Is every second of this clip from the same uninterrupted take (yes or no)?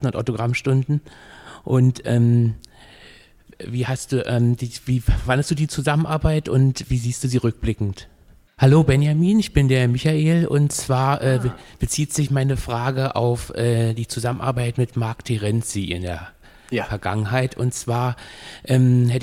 no